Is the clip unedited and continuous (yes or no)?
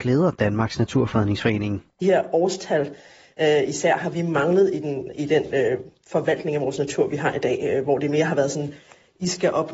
yes